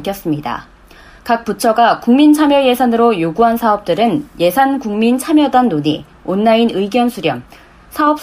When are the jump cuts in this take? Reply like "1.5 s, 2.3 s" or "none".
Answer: 1.2 s